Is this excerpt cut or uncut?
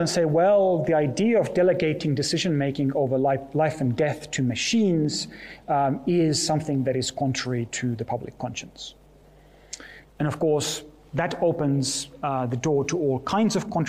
cut